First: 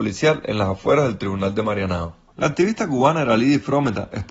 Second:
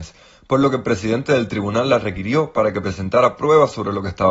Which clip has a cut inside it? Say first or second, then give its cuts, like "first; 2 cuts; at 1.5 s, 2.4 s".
first; 1 cut; at 2.3 s